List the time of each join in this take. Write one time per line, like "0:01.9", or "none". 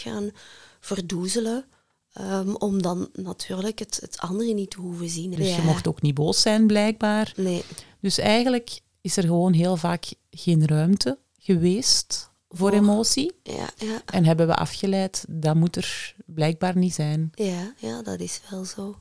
0:05.4